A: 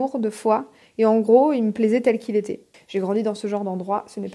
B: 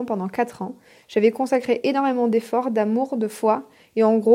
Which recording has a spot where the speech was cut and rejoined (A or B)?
A